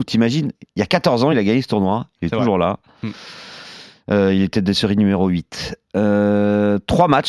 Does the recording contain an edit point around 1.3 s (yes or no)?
no